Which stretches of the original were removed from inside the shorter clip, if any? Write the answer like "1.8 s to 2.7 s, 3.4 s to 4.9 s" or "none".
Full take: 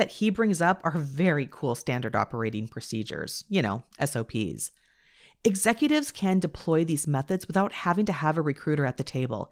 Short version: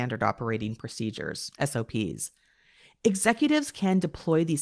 3.4 s to 3.9 s